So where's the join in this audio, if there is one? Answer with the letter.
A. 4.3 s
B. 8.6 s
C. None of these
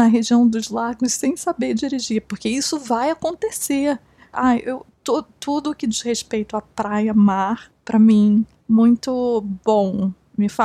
A